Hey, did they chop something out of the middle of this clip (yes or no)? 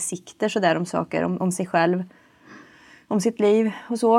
no